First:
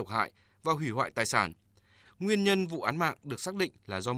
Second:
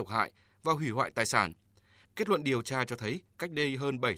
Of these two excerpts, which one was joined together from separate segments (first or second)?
first